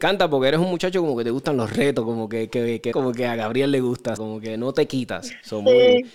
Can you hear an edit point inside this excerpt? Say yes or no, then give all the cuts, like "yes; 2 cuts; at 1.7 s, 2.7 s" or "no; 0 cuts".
yes; 2 cuts; at 2.9 s, 4.2 s